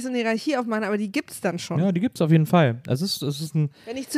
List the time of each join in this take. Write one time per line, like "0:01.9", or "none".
none